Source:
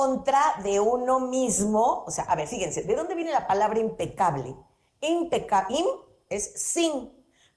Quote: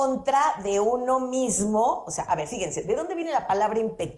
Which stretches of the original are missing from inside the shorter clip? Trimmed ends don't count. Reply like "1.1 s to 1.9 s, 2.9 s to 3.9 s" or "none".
none